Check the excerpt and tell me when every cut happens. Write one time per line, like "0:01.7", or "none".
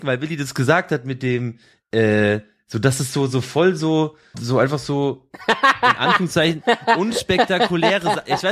0:04.3